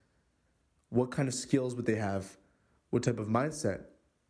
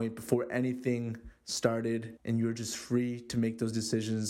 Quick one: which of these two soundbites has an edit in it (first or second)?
second